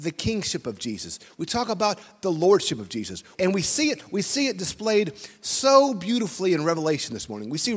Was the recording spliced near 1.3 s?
no; 1 cut; at 3.3 s

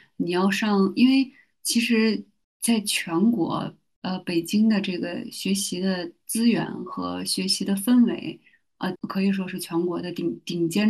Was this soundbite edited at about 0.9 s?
no; 1 cut; at 9.0 s

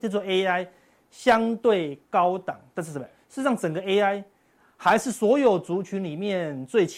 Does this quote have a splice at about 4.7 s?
no; 1 cut; at 3.1 s

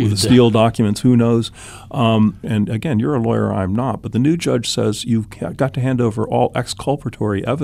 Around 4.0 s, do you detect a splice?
no; 1 cut; at 2.4 s

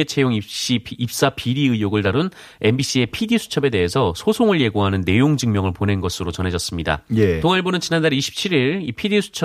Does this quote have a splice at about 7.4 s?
yes; 1 cut; at 7.4 s

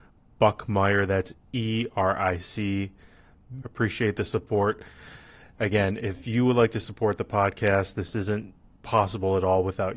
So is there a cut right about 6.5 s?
no; 1 cut; at 3.6 s

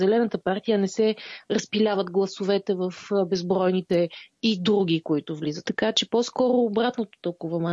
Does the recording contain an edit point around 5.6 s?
yes; 1 cut; at 5.6 s

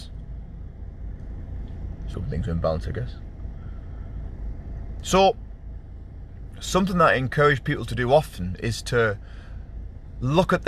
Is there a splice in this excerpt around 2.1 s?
yes; 1 cut; at 2.1 s

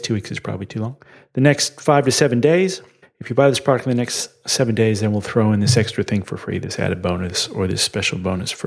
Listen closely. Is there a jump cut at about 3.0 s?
yes; 1 cut; at 3.0 s

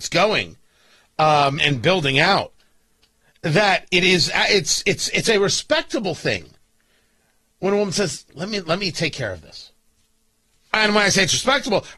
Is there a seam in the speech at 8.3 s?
yes; 2 cuts; at 1.6 s, 8.3 s

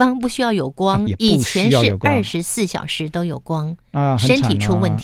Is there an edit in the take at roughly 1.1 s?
yes; 1 cut; at 1.1 s

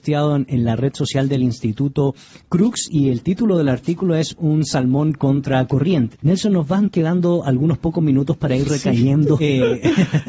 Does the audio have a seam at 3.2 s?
no; 2 cuts; at 6.1 s, 9.4 s

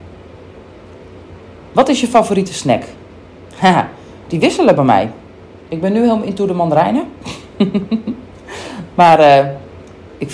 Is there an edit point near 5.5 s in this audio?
no; 1 cut; at 4.3 s

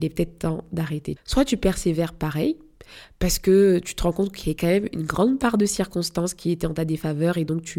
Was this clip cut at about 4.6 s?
no; 1 cut; at 1.2 s

